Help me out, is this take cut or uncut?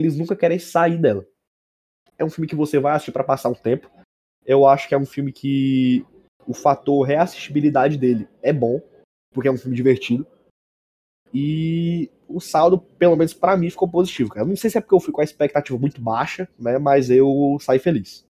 cut